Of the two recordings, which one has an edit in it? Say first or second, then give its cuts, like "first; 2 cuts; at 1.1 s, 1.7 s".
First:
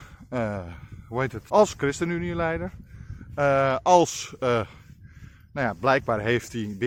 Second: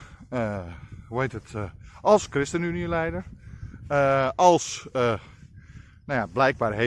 first; 1 cut; at 1.5 s